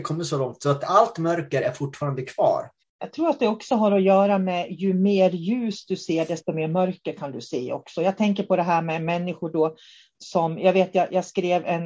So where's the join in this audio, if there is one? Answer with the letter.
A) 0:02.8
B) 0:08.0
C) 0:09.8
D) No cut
A